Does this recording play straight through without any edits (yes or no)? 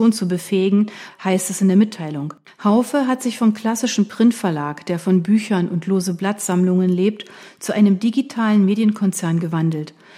no